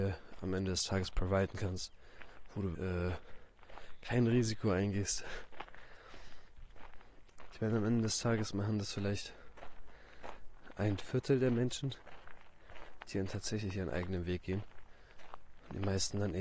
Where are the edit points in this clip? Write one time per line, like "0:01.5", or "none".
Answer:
0:02.7
0:07.5
0:13.0